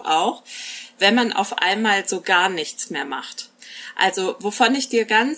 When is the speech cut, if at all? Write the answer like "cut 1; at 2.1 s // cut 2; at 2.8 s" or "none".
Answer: none